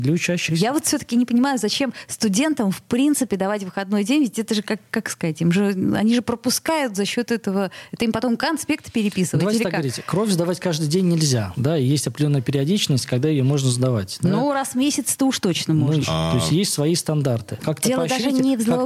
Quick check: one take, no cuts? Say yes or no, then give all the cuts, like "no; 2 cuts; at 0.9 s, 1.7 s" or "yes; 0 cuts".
no; 2 cuts; at 16.0 s, 17.6 s